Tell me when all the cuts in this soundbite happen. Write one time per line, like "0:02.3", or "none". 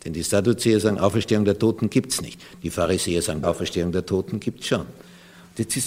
0:03.4